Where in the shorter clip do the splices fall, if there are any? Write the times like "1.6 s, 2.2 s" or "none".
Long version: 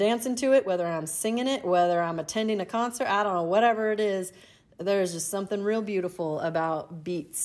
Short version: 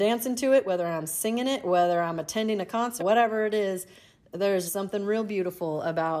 3.0 s, 4.7 s